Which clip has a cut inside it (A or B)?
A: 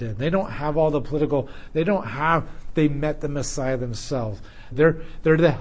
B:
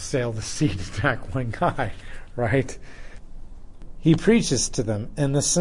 A